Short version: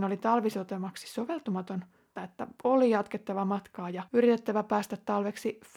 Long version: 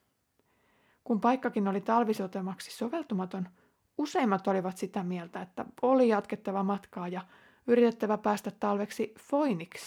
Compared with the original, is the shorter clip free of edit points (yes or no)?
no